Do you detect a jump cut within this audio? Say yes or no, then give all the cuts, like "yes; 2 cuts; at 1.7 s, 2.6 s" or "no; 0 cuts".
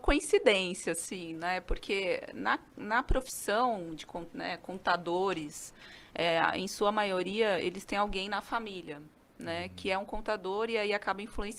no; 0 cuts